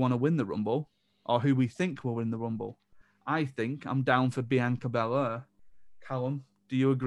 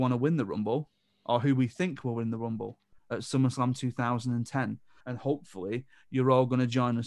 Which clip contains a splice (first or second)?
second